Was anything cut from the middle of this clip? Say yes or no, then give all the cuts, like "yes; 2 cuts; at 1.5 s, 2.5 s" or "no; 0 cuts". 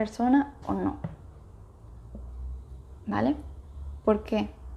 no; 0 cuts